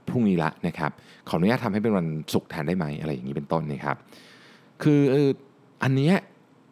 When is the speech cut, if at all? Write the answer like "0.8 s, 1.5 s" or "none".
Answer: none